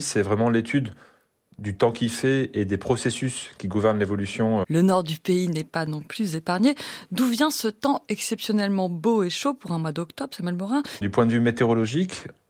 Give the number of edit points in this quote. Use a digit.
2